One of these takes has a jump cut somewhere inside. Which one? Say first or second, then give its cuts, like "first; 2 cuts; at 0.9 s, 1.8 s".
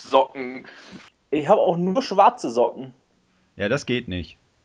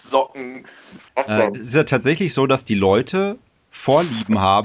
second; 1 cut; at 1.1 s